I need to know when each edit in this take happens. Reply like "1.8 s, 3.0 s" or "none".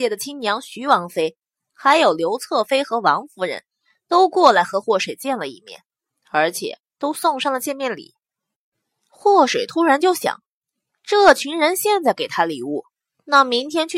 none